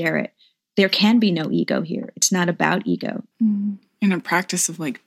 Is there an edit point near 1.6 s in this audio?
no; 1 cut; at 3.3 s

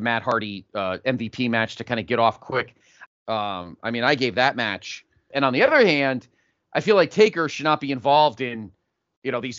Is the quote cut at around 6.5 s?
no; 2 cuts; at 3.1 s, 5.3 s

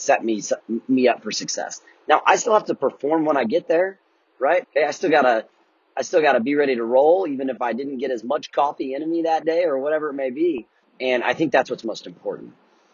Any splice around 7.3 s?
no; 2 cuts; at 4.6 s, 10.8 s

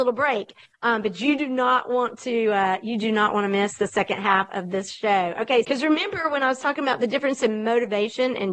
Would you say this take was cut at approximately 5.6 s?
yes; 1 cut; at 5.6 s

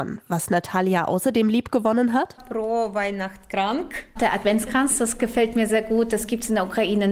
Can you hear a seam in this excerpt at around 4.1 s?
no; 1 cut; at 5.7 s

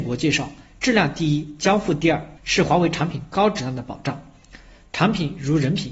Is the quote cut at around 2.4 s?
yes; 1 cut; at 2.4 s

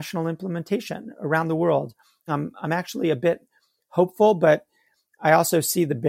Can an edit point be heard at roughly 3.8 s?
no; 1 cut; at 2.3 s

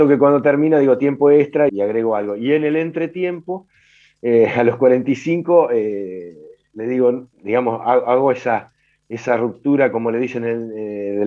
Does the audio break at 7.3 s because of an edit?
yes; 2 cuts; at 1.7 s, 7.3 s

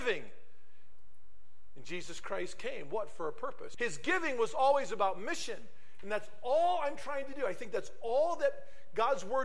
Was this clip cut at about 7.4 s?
no; 1 cut; at 3.7 s

